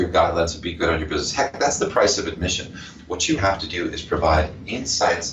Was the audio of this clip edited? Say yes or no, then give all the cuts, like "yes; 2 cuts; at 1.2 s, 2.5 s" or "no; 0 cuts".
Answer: yes; 1 cut; at 3.4 s